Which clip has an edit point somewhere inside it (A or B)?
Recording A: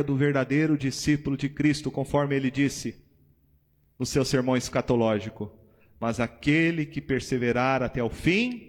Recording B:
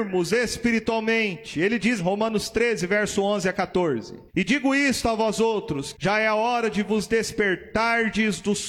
B